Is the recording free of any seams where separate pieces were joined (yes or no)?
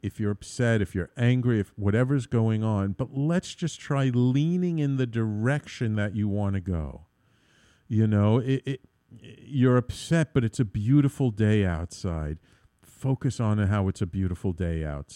yes